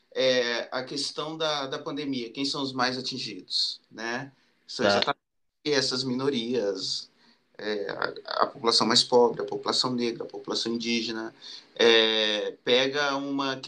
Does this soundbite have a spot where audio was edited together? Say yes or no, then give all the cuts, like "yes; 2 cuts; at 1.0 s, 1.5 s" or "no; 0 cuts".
no; 0 cuts